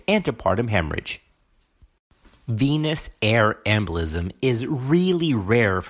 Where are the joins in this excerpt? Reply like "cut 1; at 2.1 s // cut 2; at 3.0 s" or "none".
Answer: none